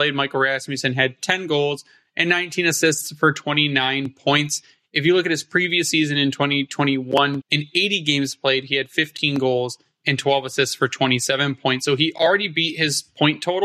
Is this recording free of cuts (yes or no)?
no